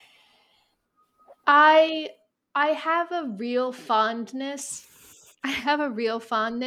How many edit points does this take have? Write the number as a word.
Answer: one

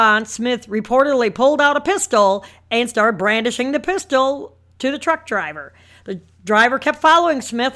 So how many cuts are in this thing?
zero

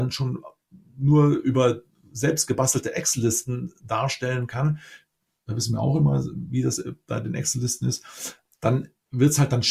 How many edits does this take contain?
zero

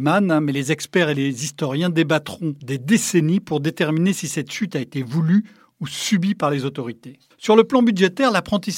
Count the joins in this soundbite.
zero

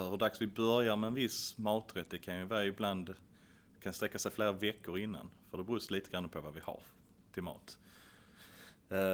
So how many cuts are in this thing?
zero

